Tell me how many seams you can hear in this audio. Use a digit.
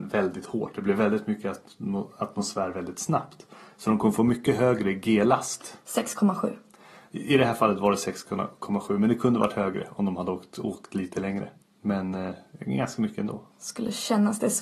2